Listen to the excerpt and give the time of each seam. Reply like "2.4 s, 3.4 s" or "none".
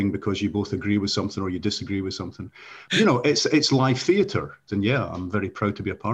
2.8 s, 4.7 s

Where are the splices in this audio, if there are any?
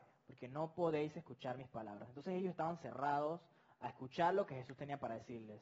none

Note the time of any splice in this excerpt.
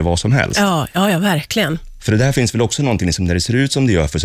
none

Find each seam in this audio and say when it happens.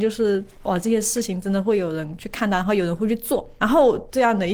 3.6 s

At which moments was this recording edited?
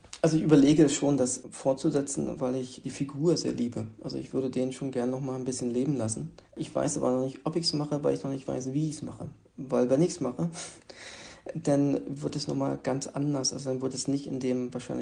6.4 s

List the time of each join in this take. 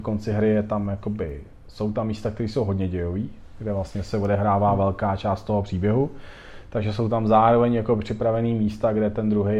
none

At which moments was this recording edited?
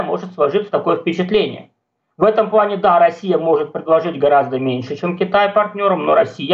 none

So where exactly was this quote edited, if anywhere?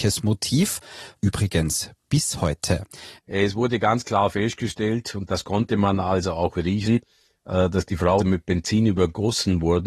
1.1 s, 3.2 s, 8.2 s

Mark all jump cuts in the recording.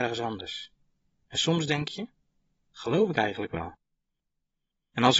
none

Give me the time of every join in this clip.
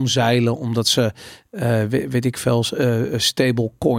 none

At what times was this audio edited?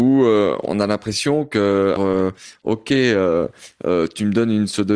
2.0 s

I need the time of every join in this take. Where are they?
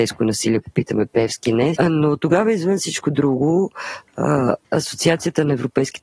1.8 s, 4.6 s

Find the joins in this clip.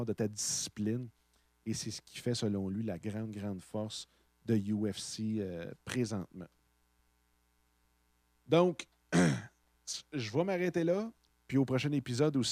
11.3 s

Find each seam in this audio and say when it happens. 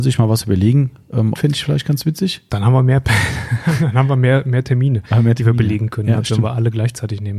1.3 s

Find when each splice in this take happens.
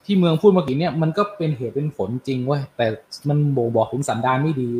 none

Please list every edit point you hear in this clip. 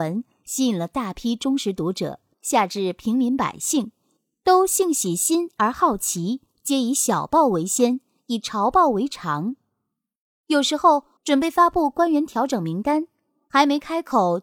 2.3 s, 11.2 s

